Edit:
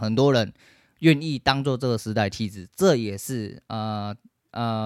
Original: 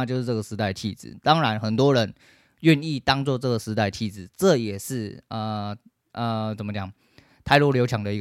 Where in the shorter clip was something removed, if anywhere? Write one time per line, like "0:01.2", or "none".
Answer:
none